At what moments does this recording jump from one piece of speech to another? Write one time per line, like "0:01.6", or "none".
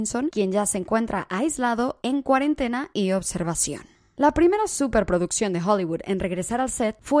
none